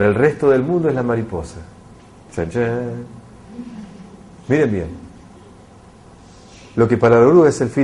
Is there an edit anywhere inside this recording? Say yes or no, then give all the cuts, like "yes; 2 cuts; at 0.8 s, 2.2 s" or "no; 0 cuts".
no; 0 cuts